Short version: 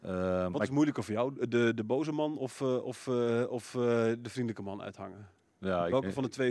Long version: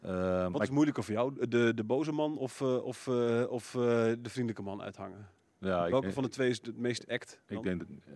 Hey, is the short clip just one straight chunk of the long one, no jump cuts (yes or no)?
yes